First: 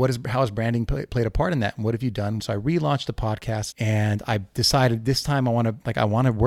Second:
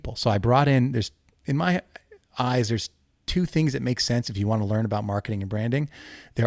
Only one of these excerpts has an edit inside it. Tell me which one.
first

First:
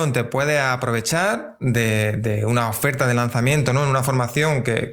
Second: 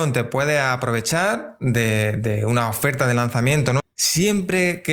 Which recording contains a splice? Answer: second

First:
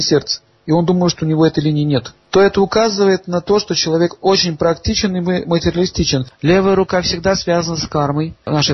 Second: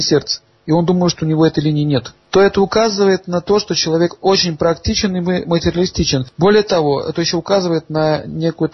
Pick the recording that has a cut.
first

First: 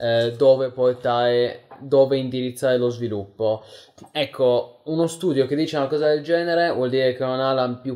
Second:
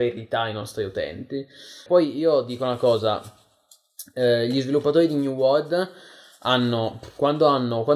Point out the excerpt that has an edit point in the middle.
second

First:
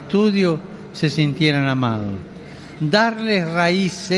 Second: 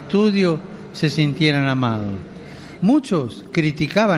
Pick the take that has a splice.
second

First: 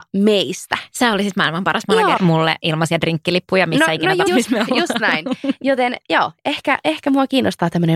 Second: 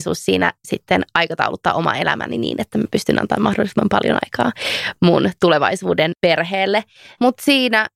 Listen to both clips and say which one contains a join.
first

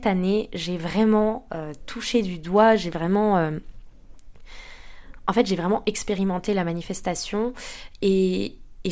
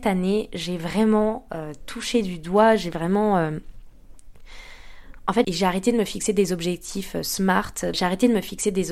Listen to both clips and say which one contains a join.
second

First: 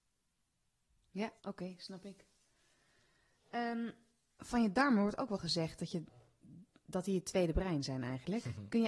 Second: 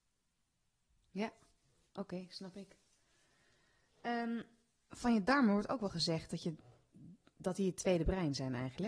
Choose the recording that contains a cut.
first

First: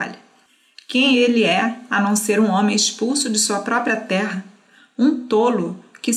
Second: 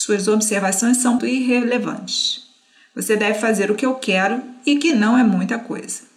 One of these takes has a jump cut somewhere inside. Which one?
second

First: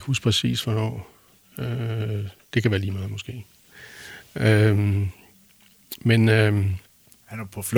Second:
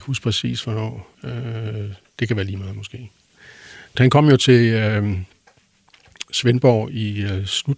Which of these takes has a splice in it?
second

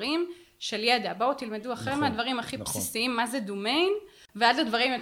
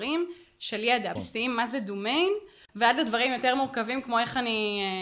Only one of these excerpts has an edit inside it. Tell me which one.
second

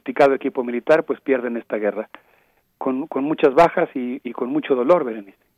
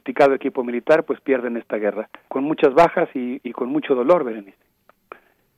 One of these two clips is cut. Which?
second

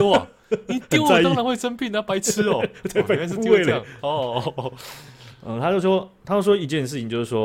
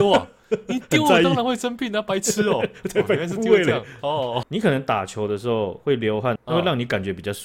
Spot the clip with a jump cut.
second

